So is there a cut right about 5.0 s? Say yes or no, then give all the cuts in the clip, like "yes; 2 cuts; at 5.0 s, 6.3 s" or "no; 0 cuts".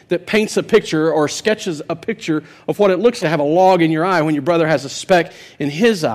no; 1 cut; at 3.2 s